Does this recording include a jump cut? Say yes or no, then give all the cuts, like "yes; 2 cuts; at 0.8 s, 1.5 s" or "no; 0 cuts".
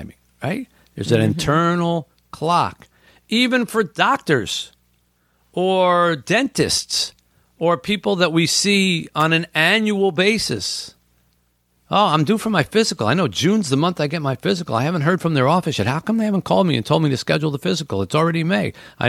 no; 0 cuts